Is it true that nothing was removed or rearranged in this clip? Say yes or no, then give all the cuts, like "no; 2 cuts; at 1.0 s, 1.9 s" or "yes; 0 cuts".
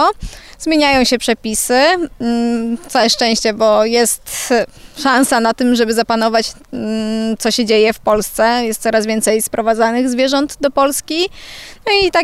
yes; 0 cuts